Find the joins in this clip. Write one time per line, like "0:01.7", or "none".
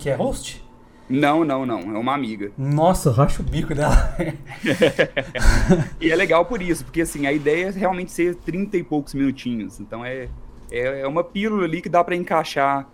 none